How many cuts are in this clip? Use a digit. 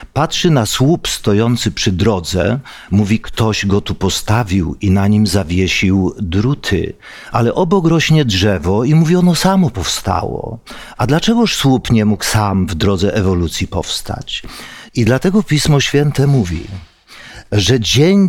1